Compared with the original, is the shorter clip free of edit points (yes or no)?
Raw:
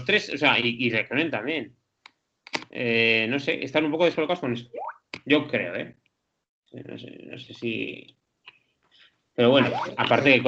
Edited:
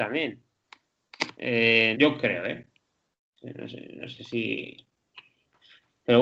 no